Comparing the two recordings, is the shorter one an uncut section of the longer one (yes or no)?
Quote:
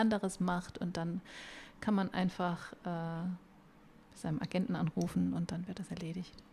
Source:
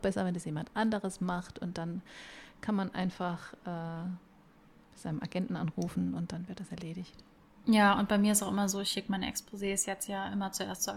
yes